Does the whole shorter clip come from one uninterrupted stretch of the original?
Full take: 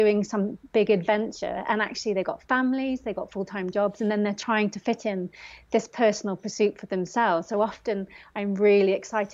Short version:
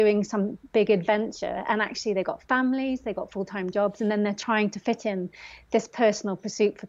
yes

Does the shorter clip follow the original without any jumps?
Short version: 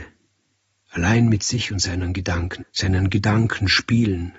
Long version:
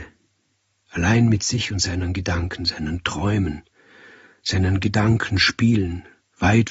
no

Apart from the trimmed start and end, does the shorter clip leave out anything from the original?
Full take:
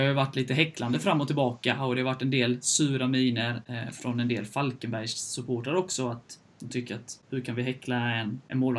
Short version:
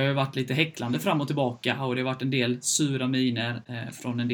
no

